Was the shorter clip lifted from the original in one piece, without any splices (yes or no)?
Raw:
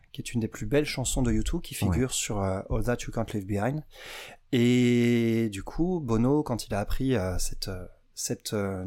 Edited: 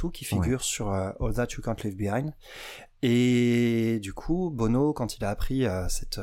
yes